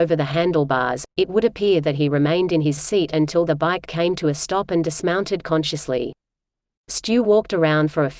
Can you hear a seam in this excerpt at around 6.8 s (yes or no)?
no